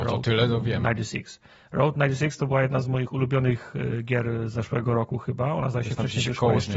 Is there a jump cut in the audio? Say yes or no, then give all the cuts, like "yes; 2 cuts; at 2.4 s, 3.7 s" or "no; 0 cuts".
no; 0 cuts